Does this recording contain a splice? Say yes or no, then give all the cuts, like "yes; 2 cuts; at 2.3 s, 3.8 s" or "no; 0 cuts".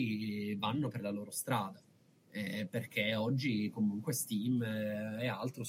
no; 0 cuts